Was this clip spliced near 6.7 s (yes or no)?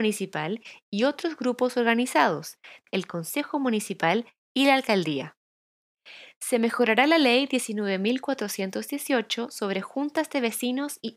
no